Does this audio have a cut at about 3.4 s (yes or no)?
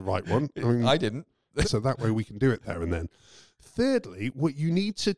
no